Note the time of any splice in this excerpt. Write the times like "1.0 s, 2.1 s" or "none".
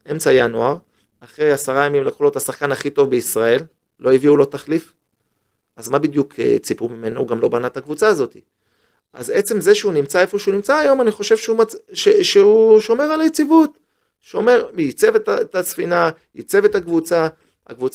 none